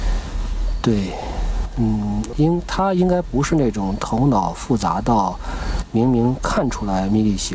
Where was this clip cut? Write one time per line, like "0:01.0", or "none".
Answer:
0:02.3